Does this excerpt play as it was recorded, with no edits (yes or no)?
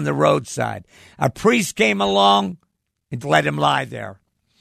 no